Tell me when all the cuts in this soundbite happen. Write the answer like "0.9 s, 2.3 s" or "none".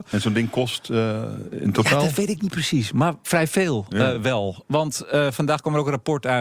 none